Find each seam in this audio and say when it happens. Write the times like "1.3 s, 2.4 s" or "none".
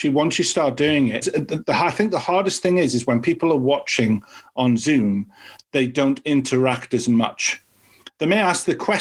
1.2 s